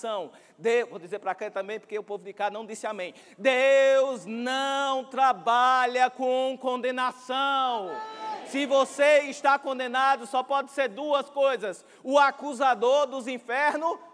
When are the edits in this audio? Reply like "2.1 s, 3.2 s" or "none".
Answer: none